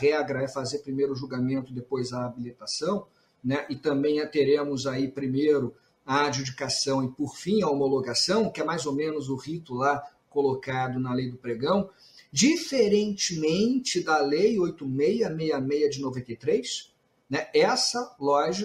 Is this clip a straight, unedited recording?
yes; 0 cuts

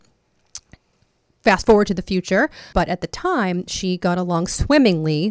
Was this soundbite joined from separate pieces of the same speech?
yes; 1 cut; at 2.7 s

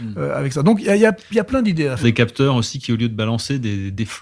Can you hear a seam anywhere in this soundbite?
yes; 1 cut; at 2.0 s

